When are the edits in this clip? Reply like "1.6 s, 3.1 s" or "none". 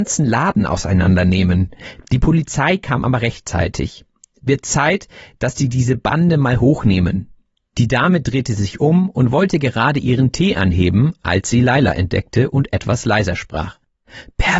none

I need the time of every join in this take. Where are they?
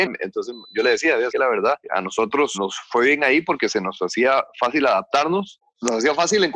none

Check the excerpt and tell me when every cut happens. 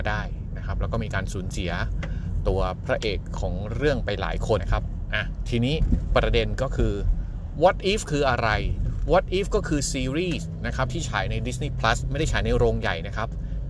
4.6 s

